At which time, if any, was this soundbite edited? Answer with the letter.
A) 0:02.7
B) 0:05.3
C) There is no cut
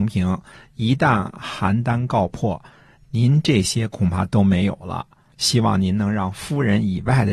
B